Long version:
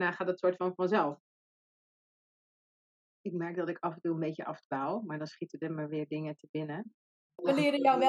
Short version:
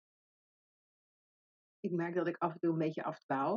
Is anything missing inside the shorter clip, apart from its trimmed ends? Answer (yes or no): no